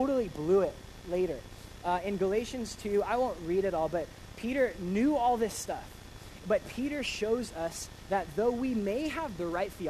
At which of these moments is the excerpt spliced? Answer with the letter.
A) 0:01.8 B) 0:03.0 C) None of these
C